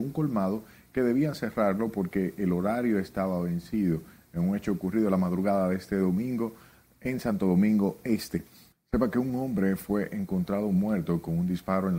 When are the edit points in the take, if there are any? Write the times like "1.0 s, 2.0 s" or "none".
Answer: 8.7 s